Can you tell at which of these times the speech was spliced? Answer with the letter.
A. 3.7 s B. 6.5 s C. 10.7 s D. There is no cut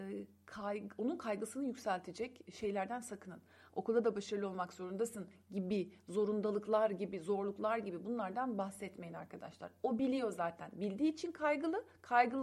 A